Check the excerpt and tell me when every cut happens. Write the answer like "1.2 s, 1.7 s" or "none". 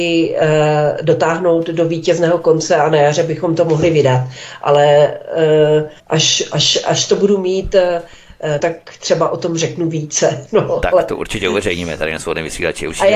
6.0 s, 8.6 s